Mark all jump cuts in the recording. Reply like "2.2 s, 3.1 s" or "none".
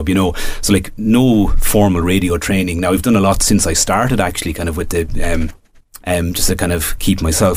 6.0 s